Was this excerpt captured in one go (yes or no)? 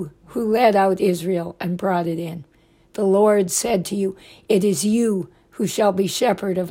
yes